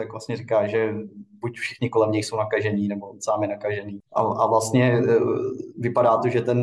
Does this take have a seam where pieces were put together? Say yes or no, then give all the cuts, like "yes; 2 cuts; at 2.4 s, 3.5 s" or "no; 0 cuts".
yes; 1 cut; at 4.0 s